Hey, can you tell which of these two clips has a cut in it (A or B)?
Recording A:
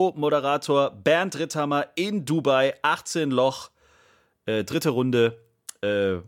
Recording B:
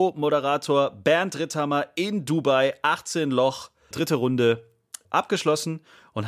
B